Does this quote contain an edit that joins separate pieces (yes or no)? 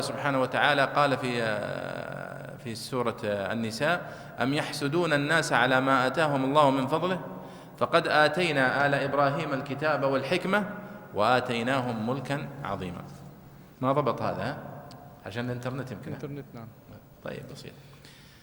yes